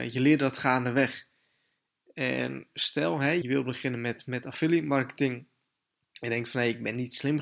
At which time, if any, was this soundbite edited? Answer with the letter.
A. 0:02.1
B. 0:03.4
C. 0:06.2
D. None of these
B